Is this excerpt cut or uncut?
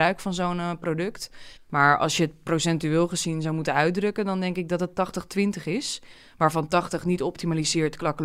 cut